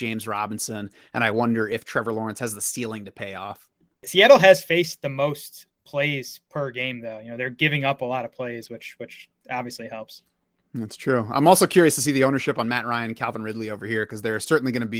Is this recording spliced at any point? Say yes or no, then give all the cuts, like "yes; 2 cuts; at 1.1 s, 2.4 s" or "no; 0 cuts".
no; 0 cuts